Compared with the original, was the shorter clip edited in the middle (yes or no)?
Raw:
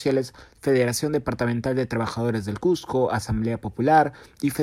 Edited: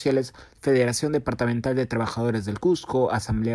no